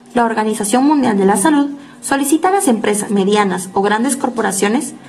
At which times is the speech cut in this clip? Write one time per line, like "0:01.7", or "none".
0:03.1